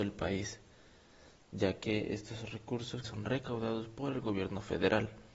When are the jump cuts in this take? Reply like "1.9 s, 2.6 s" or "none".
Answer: 3.0 s